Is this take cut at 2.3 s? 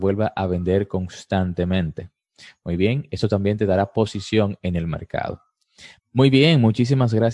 no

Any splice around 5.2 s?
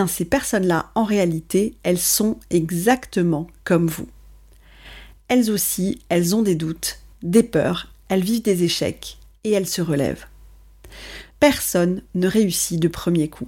no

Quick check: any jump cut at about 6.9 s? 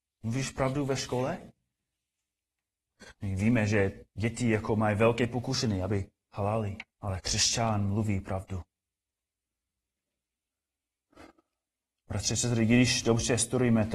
yes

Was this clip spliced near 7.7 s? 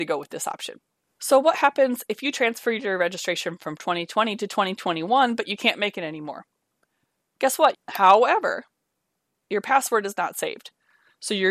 yes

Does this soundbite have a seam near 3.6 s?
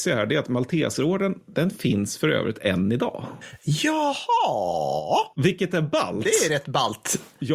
no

